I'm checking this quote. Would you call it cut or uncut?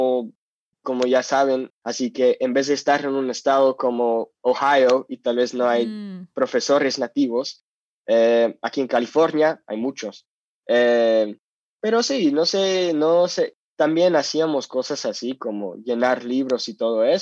cut